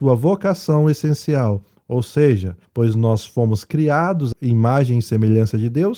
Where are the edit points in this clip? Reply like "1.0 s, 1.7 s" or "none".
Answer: 2.6 s